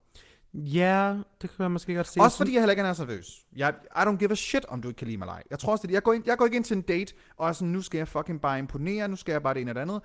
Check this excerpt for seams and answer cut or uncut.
uncut